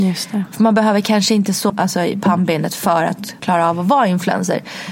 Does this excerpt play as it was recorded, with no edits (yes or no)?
no